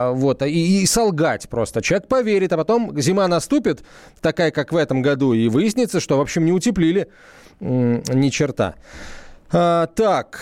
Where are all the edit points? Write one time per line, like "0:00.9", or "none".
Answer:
none